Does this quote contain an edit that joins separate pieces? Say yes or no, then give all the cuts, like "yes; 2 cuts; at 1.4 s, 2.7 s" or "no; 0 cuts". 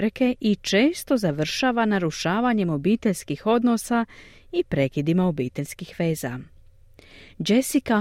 no; 0 cuts